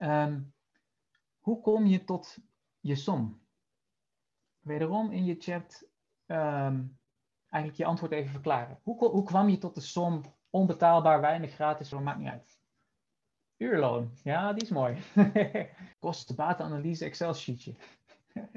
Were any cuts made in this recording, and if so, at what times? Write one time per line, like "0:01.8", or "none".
0:11.9
0:15.9

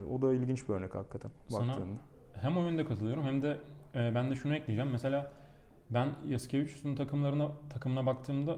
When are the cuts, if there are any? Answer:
none

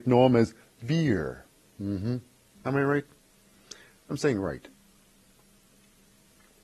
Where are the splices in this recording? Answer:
0:02.5

